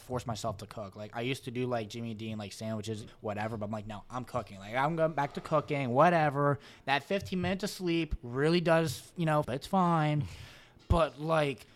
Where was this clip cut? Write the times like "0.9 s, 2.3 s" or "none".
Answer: 3.1 s, 9.4 s